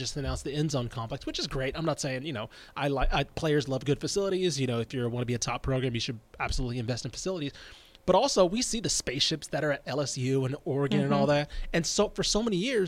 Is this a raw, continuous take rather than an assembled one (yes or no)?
yes